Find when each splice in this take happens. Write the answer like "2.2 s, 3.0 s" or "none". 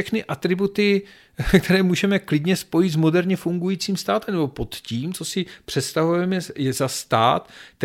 none